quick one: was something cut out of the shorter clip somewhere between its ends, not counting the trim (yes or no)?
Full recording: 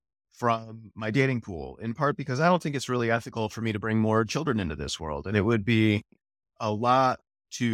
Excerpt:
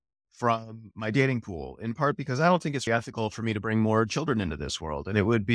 yes